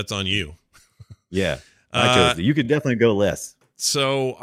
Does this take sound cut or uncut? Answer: uncut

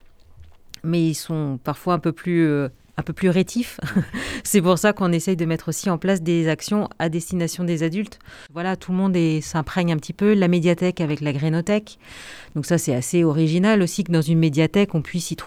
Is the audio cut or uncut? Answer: uncut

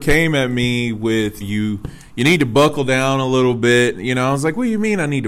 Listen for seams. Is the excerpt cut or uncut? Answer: cut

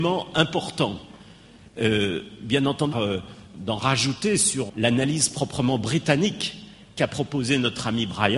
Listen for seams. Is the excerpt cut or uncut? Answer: cut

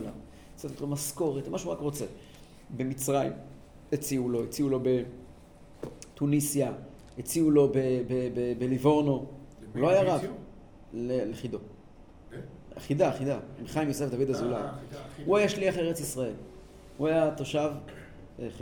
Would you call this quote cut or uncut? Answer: uncut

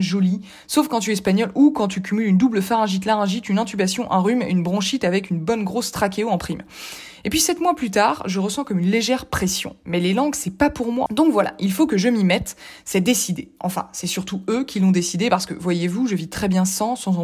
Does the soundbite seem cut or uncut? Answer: cut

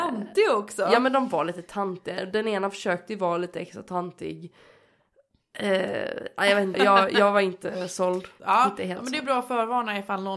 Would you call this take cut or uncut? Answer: cut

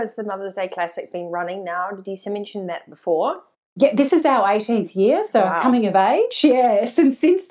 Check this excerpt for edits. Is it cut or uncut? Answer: uncut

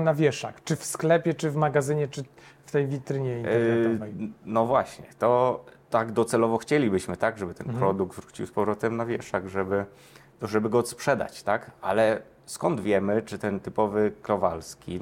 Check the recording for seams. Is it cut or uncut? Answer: cut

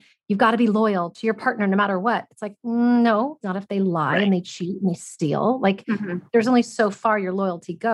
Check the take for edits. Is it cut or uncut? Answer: cut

